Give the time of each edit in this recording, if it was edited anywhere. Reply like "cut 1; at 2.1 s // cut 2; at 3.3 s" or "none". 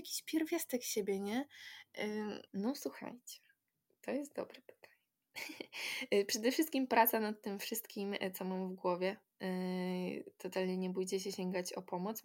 cut 1; at 2.5 s